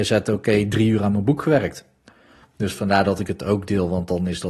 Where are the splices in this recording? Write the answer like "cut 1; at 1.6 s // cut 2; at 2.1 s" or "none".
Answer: cut 1; at 2.4 s